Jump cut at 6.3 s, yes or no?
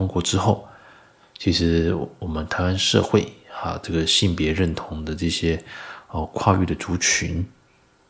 no